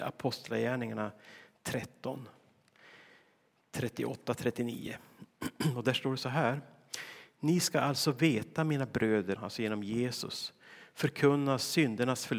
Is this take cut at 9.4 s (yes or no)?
yes